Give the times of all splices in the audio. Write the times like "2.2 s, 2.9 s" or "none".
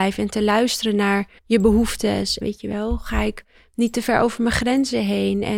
1.4 s, 2.4 s